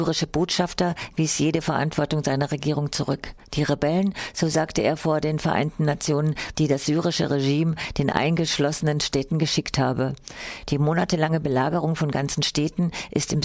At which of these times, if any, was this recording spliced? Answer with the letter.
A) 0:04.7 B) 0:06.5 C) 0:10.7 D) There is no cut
B